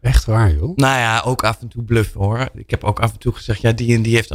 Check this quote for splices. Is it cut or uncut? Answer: uncut